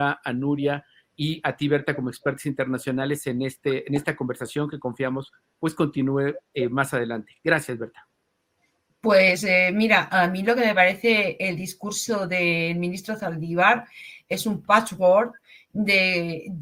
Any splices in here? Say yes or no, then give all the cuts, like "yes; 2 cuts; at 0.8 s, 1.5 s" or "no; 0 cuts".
no; 0 cuts